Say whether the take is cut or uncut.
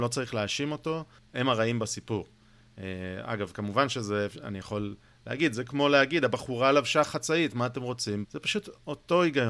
cut